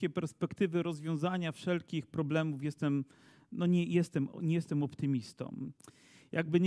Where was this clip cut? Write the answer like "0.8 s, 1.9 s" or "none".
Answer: none